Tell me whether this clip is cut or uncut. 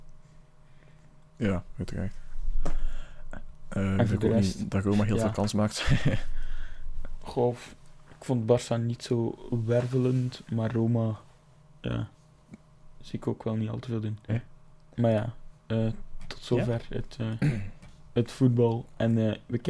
cut